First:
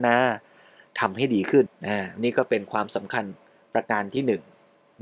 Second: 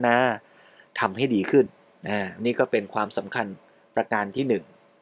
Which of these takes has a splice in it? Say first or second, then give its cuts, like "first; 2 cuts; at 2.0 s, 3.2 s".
first; 1 cut; at 1.7 s